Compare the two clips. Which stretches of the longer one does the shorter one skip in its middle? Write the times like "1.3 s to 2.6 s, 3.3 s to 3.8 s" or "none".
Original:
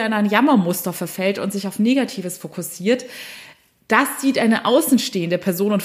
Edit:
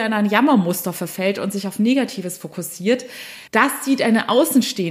3.5 s to 3.8 s